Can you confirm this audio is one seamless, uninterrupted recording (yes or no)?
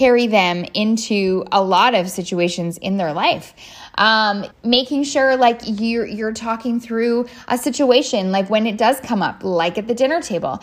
no